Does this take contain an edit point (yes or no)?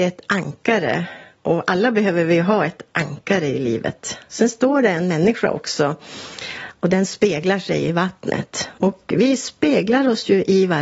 no